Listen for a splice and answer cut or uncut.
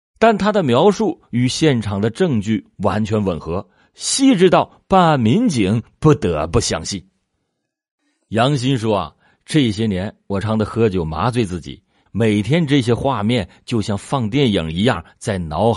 cut